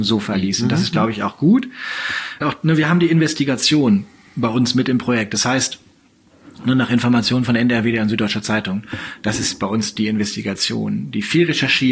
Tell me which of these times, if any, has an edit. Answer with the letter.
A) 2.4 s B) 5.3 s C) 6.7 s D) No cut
A